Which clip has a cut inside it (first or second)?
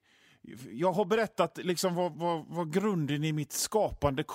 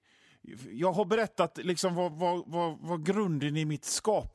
first